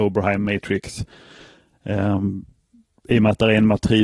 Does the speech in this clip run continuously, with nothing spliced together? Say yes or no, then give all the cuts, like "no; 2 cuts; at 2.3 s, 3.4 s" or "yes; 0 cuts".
yes; 0 cuts